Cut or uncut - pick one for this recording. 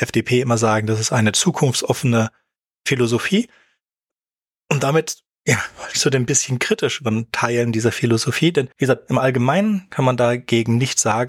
cut